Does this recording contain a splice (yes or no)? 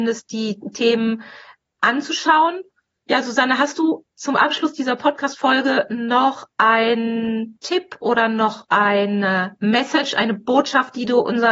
no